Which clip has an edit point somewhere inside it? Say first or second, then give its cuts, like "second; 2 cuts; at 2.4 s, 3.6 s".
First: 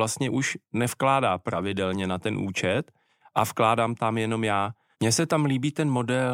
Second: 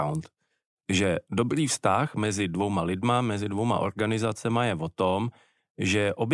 first; 1 cut; at 4.9 s